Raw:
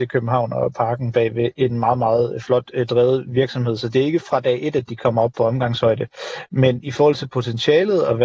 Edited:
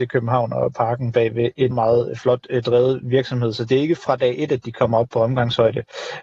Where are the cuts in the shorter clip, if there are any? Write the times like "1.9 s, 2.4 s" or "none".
1.7 s